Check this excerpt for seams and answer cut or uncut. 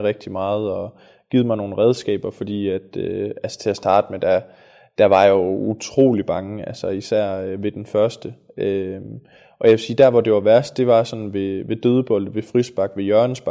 uncut